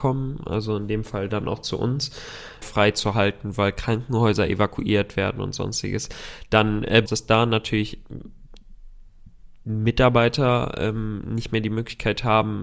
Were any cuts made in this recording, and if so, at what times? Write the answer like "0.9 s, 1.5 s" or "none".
2.6 s, 7.1 s